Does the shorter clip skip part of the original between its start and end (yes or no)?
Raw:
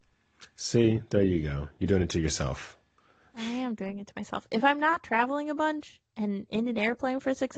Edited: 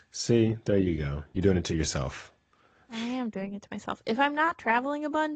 no